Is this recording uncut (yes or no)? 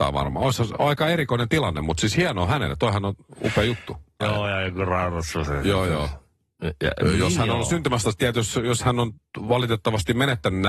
no